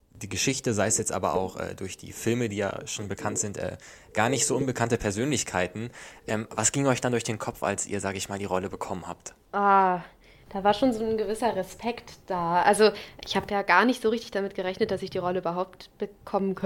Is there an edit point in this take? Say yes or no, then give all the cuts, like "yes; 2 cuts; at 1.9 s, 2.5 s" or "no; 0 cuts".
no; 0 cuts